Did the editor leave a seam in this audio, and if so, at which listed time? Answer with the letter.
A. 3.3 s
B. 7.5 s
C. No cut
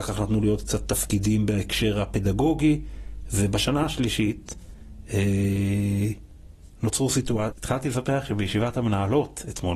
B